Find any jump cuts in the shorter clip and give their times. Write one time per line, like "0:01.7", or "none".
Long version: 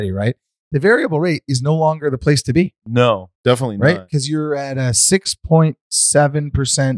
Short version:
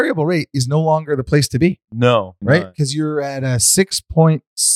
0:02.4

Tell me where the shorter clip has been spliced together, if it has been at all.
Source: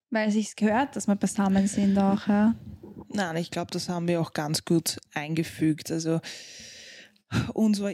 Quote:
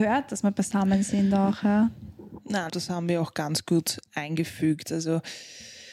0:02.7

